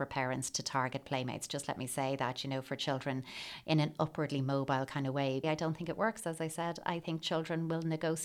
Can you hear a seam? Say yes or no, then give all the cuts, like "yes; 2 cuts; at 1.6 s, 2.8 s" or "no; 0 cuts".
yes; 1 cut; at 5.4 s